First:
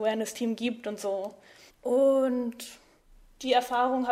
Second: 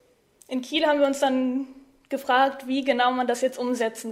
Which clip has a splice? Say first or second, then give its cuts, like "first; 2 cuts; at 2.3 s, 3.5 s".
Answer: first; 1 cut; at 1.7 s